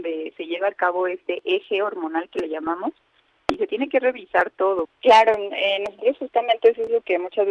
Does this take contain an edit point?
yes; 1 cut; at 4.8 s

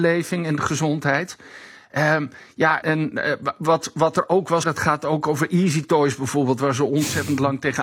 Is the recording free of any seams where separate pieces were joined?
no; 2 cuts; at 2.8 s, 4.6 s

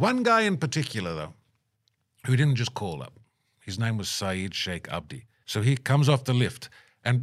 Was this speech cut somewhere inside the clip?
yes; 2 cuts; at 3.5 s, 5.4 s

